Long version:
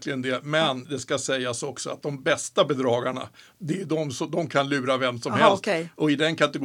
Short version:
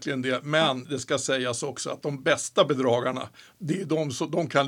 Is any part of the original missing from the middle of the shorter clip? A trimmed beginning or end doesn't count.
no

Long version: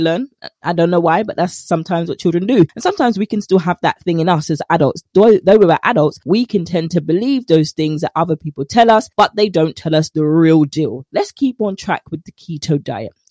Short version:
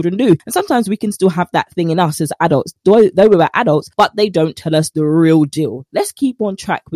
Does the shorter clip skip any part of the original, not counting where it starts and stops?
yes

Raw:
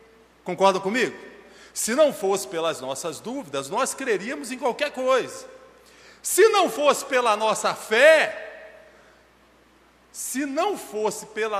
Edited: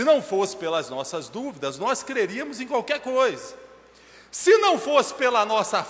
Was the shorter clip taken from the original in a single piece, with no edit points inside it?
yes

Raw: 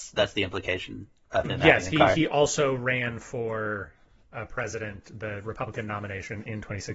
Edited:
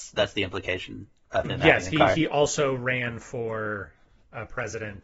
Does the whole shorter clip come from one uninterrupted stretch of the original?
yes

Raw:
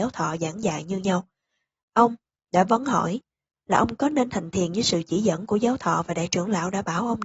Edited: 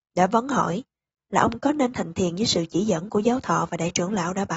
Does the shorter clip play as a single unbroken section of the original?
yes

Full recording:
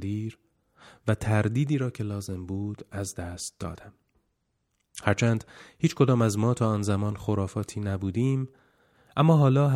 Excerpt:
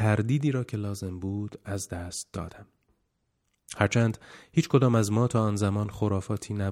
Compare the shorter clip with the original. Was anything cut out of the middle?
no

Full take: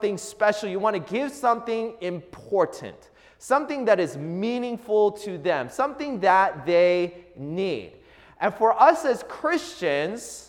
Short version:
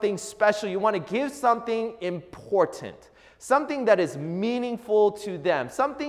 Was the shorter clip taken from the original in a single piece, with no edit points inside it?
yes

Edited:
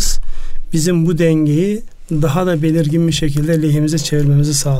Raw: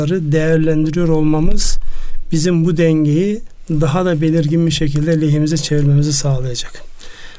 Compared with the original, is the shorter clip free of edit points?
yes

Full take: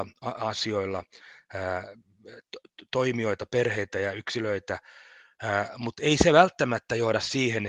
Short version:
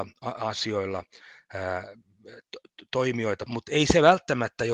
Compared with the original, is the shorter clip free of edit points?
no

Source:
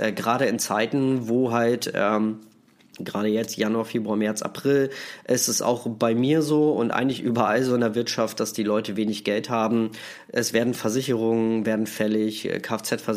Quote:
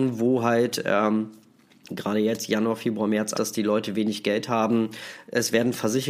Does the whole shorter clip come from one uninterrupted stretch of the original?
no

